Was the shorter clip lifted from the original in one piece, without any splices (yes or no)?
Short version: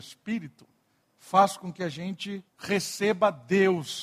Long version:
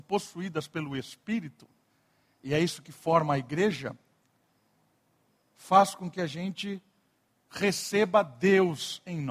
no